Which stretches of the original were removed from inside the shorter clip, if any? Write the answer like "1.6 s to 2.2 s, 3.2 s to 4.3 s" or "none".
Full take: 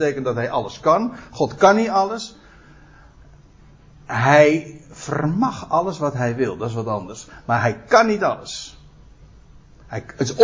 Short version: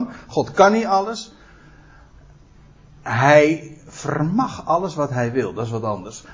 none